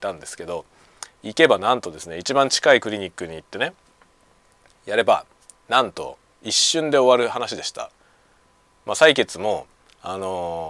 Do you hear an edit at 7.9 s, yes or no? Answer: no